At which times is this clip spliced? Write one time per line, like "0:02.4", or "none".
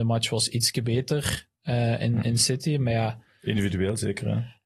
none